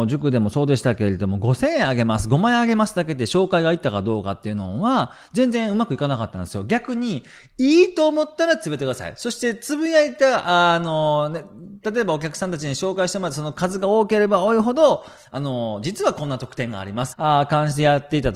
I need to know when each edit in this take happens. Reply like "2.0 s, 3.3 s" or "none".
11.8 s, 17.1 s

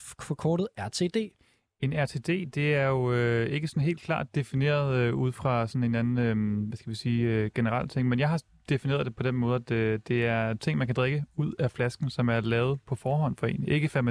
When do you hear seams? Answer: none

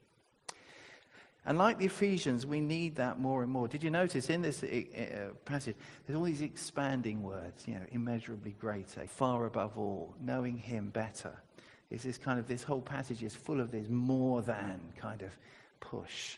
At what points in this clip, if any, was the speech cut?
1.3 s, 9.1 s

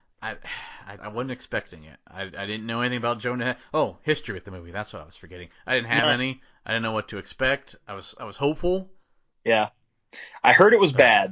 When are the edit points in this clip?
1.0 s

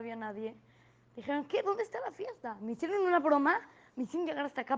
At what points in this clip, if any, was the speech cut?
none

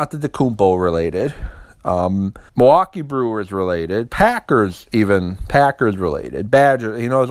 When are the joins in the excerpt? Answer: 2.5 s

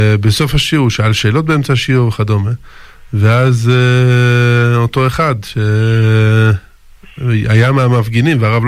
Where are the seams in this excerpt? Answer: none

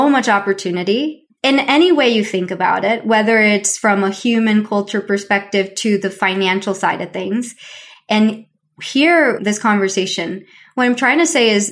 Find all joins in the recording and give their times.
7.9 s, 9.4 s

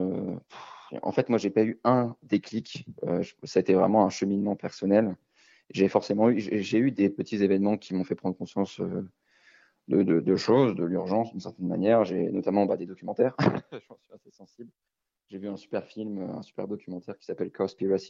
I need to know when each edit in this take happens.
none

